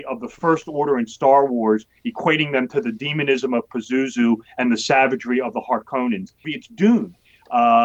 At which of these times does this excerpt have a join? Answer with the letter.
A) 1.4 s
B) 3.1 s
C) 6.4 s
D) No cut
C